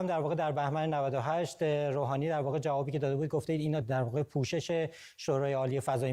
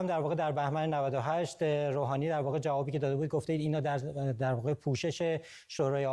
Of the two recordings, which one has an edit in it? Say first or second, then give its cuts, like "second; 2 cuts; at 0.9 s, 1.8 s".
first; 1 cut; at 3.8 s